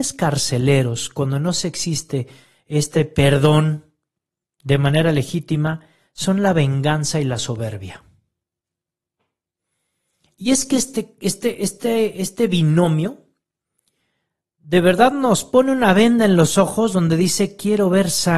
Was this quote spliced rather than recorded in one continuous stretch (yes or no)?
no